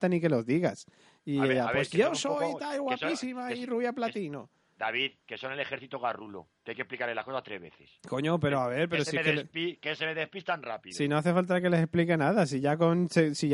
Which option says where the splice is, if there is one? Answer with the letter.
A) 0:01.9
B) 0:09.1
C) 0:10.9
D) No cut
D